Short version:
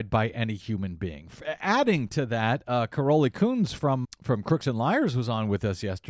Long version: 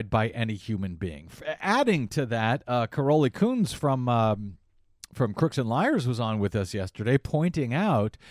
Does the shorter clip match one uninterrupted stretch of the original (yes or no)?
no